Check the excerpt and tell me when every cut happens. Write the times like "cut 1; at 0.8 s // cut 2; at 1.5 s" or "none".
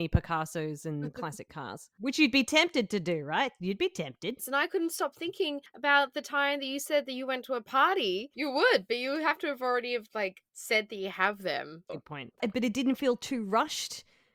cut 1; at 4.4 s // cut 2; at 8.3 s // cut 3; at 11.9 s